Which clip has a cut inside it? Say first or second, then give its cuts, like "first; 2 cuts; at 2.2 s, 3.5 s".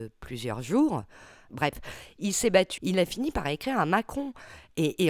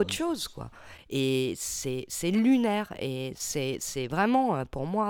first; 2 cuts; at 1.5 s, 2.8 s